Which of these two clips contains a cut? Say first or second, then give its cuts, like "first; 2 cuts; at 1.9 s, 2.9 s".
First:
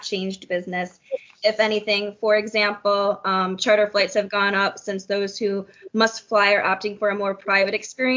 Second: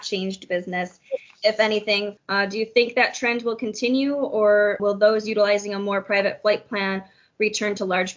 second; 2 cuts; at 2.2 s, 4.8 s